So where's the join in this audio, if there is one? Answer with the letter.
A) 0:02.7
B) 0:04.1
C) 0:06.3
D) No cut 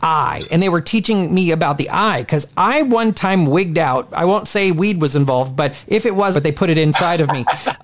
C